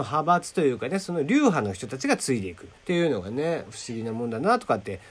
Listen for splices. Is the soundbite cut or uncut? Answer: cut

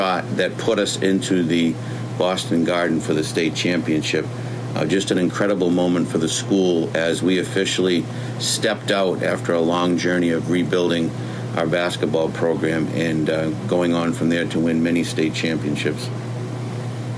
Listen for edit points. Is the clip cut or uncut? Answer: uncut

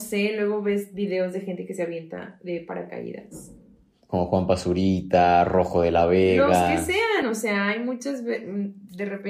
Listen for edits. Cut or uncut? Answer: uncut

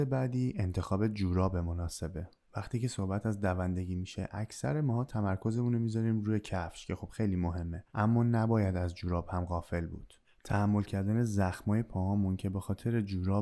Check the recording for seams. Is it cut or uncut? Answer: uncut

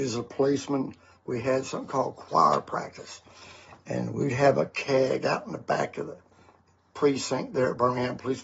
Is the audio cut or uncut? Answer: uncut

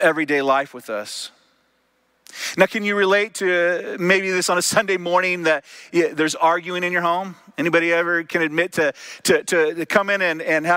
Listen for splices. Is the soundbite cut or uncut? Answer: uncut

